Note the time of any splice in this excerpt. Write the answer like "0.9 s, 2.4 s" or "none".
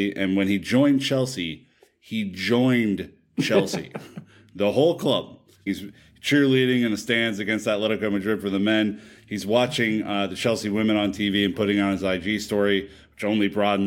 5.7 s